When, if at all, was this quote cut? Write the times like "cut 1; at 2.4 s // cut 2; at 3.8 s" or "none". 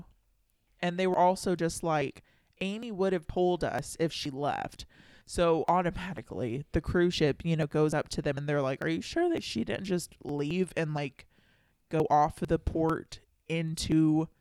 none